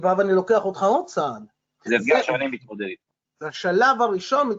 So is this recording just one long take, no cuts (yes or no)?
no